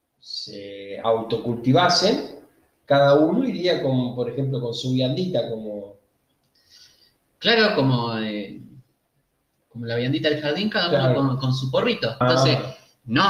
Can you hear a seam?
yes; 1 cut; at 12.2 s

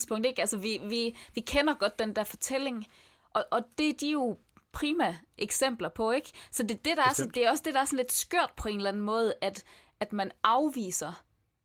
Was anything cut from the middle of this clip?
no; 0 cuts

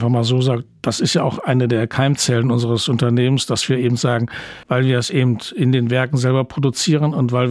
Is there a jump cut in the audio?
yes; 1 cut; at 4.6 s

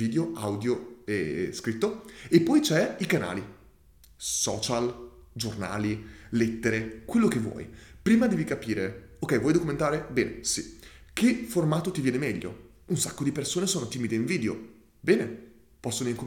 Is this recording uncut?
yes; 0 cuts

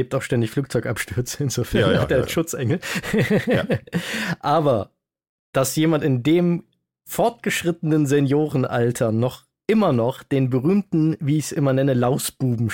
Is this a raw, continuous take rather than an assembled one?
yes; 0 cuts

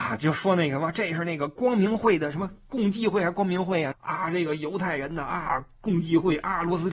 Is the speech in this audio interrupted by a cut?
yes; 1 cut; at 3.9 s

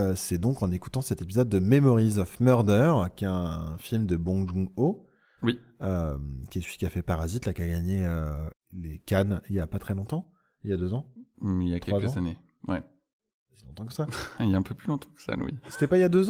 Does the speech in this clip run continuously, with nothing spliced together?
no; 1 cut; at 8.5 s

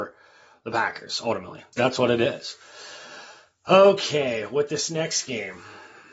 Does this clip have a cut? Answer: yes; 1 cut; at 1.7 s

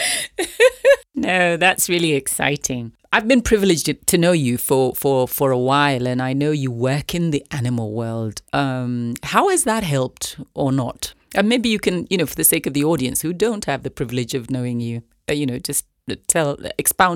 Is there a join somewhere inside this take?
no; 0 cuts

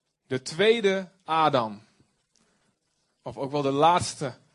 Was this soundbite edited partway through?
no; 0 cuts

